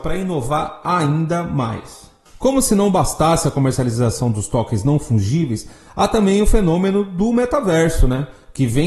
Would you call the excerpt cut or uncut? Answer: uncut